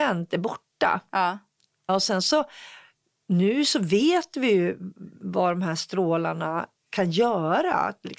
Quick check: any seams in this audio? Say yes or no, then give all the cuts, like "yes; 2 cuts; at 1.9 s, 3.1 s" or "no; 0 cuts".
no; 0 cuts